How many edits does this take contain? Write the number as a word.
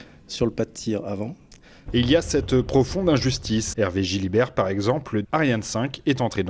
three